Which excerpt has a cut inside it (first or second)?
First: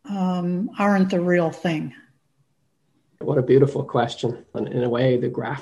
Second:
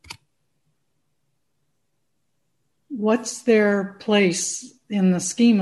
first